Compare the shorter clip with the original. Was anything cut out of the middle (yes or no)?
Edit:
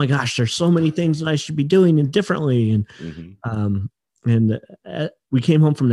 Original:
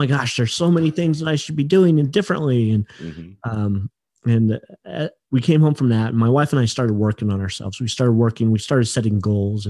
no